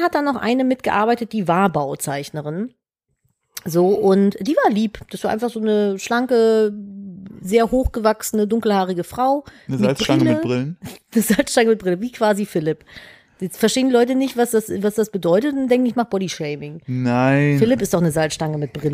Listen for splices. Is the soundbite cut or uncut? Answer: uncut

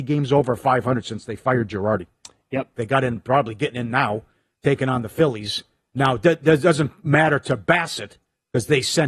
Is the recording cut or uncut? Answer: cut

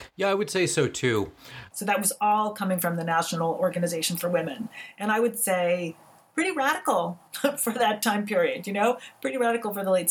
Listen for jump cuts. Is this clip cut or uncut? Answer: cut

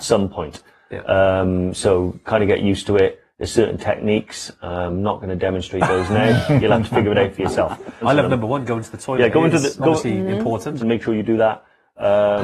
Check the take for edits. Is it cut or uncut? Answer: cut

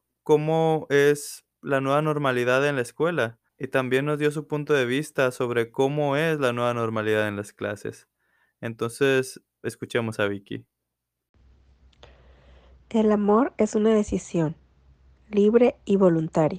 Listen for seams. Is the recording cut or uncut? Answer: cut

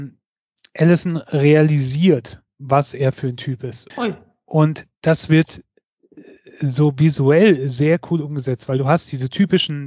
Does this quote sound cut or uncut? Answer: cut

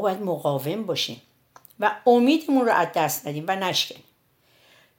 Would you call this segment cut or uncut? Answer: uncut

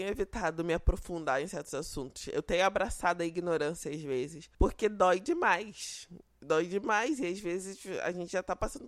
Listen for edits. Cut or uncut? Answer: uncut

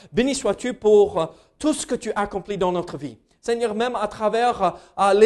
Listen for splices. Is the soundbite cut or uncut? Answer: uncut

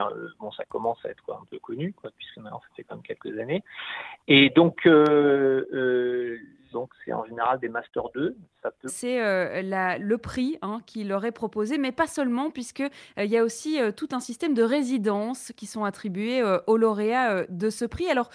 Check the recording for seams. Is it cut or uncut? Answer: cut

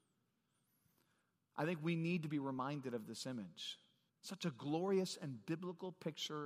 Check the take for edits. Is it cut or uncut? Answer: cut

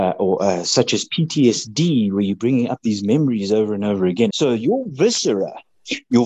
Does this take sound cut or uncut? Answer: cut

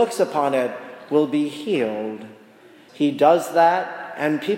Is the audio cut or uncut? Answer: cut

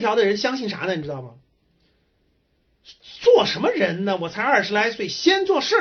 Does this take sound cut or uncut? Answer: uncut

